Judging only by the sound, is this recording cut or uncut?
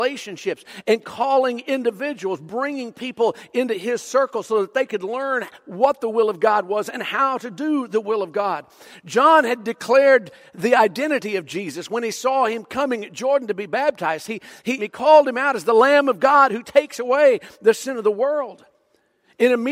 cut